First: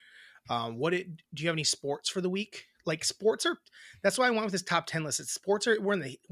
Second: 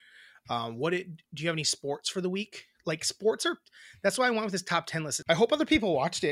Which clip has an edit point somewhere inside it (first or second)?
second